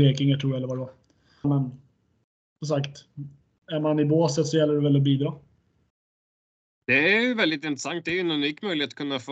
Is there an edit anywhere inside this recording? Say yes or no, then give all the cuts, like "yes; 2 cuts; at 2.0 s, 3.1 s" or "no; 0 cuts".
yes; 1 cut; at 1.4 s